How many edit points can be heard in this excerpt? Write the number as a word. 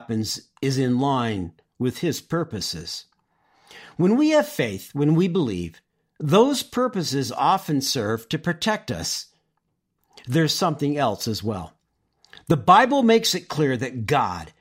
zero